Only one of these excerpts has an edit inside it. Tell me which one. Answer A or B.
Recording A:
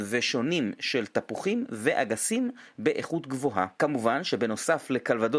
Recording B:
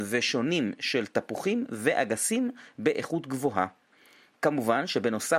A